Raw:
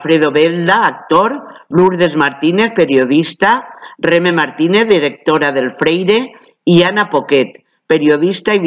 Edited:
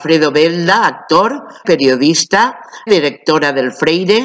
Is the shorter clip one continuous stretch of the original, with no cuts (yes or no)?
no